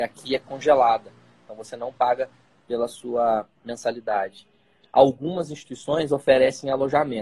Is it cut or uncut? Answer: uncut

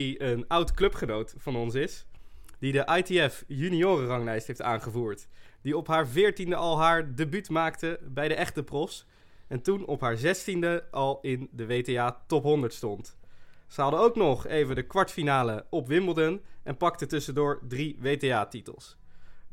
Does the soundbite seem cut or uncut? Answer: uncut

